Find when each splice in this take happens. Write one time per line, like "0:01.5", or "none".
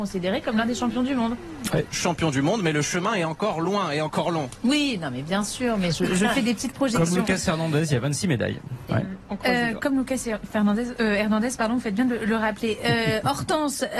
0:08.9